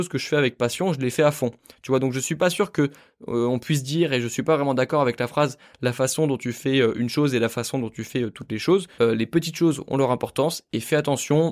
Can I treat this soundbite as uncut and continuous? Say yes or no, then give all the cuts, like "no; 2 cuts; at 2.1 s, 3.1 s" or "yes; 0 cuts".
no; 1 cut; at 9.0 s